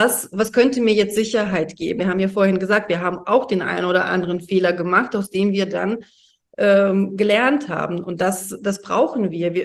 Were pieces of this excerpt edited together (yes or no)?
yes